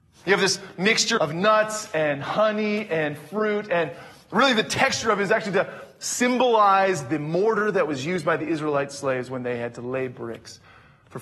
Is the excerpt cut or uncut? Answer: cut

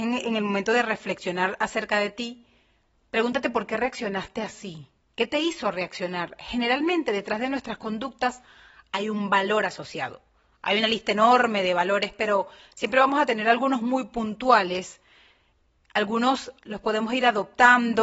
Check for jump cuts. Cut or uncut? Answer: uncut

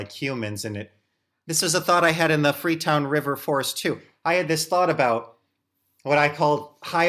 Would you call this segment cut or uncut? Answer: uncut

